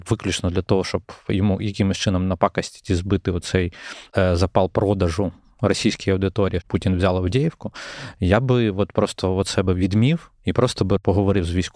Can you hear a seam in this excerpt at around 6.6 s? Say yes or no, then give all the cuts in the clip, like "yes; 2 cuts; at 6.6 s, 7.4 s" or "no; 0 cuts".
yes; 1 cut; at 6.6 s